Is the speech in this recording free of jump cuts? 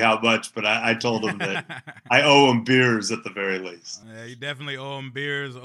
yes; 0 cuts

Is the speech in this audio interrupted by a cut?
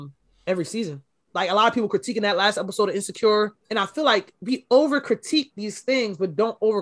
yes; 1 cut; at 1.3 s

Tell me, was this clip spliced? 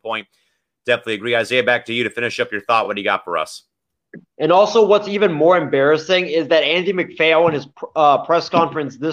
no; 0 cuts

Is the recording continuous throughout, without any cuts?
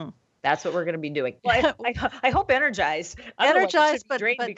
no; 1 cut; at 1.4 s

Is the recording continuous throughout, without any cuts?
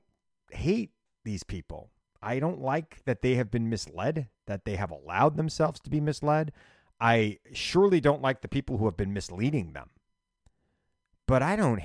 yes; 0 cuts

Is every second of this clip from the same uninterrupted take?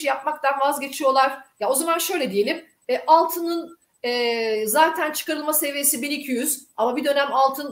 yes; 0 cuts

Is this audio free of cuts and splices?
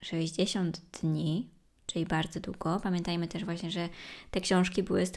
yes; 0 cuts

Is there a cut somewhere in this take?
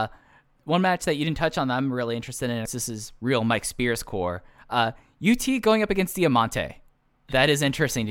yes; 1 cut; at 2.7 s

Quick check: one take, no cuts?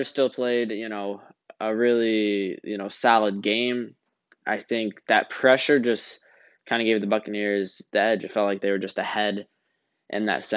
yes; 0 cuts

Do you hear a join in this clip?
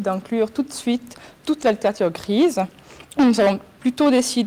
yes; 1 cut; at 3.1 s

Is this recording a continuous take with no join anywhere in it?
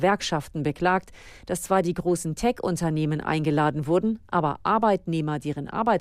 yes; 0 cuts

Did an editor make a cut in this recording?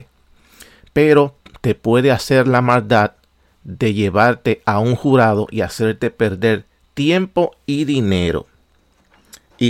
no; 0 cuts

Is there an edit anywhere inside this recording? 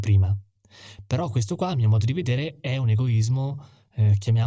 no; 0 cuts

